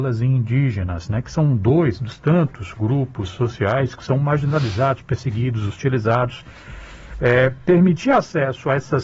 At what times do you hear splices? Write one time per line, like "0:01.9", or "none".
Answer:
none